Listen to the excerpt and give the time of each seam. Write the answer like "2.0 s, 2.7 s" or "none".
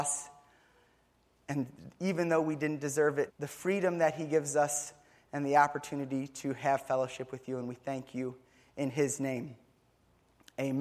3.3 s